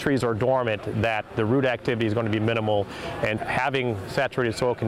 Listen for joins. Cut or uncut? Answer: cut